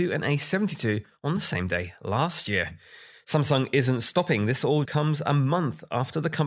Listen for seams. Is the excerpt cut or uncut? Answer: cut